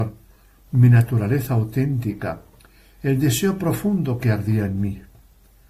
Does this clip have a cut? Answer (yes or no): no